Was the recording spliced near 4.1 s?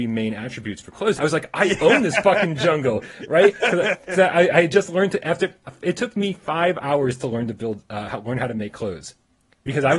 no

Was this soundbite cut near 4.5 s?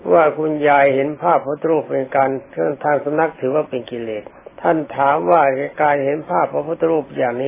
yes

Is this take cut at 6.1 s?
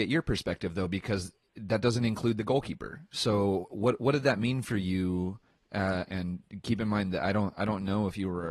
yes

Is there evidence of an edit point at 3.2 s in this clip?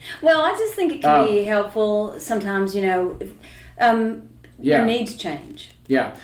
no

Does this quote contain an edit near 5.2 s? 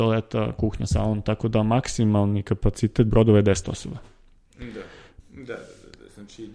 yes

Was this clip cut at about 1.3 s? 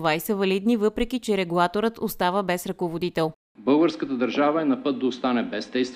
no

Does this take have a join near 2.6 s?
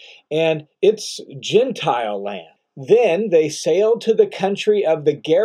yes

